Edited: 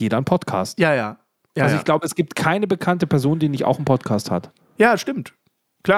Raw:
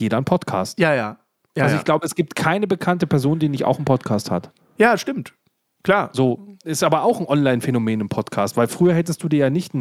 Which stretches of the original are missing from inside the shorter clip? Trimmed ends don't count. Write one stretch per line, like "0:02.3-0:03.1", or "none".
none